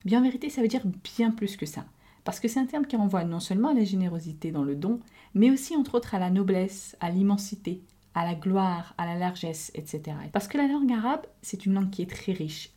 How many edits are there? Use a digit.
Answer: 1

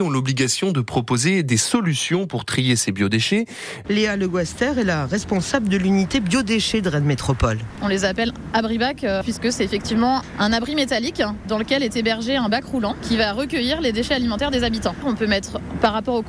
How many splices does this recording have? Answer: 1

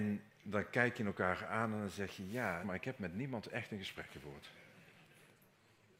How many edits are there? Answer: 1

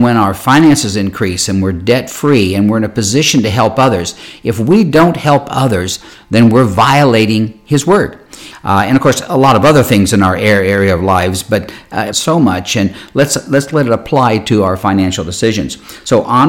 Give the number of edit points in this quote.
2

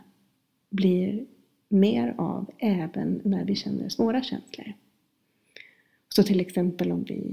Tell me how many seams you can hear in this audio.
0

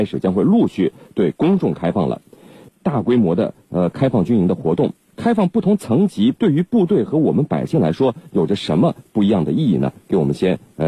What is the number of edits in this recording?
2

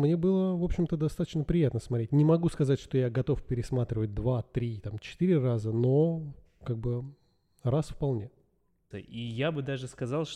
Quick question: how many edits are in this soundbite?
1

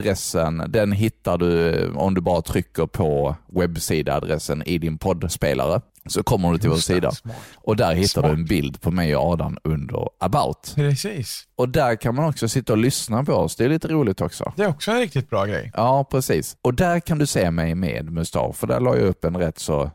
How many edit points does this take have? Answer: 0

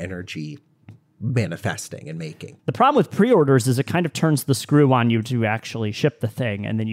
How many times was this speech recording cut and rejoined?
1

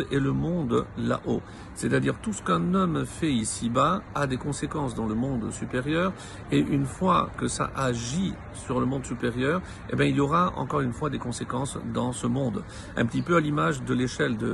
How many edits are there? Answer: 0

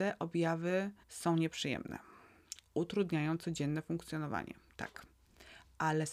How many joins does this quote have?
1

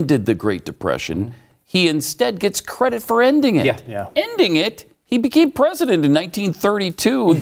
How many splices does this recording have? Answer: 0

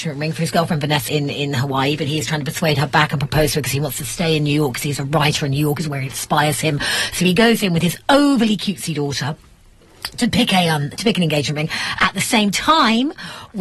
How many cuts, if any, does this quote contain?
1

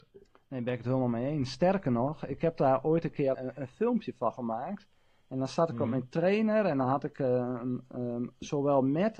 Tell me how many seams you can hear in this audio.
1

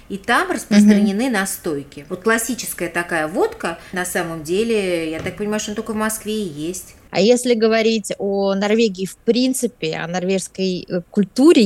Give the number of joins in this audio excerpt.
2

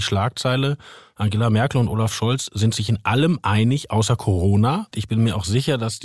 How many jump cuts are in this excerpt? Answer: 1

